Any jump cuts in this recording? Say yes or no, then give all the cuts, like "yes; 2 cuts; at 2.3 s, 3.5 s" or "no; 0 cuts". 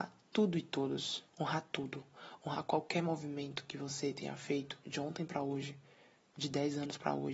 yes; 1 cut; at 1.3 s